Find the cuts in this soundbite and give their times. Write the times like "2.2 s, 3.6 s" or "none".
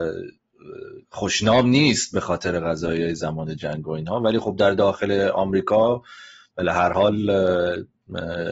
1.0 s

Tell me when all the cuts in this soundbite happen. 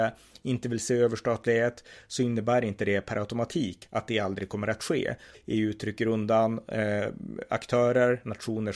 5.3 s

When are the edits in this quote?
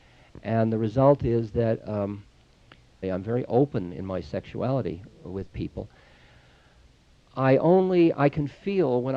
3.0 s

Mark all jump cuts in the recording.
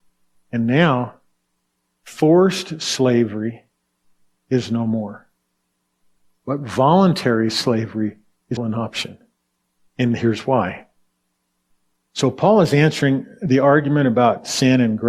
8.6 s, 12.1 s

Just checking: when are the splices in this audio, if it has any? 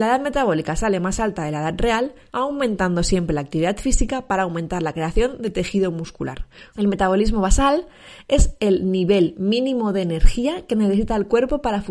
2.3 s, 6.7 s

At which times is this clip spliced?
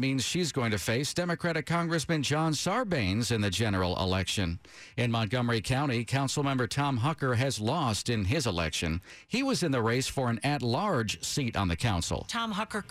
none

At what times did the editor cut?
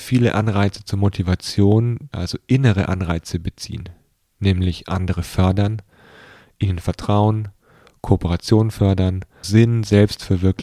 2.1 s, 9.4 s

